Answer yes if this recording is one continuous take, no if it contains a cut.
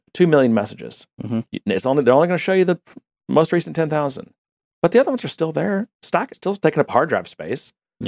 no